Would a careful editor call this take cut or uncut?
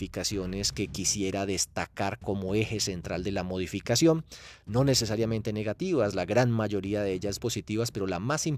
cut